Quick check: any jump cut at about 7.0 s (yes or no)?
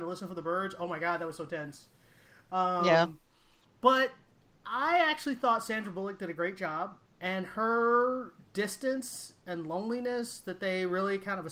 yes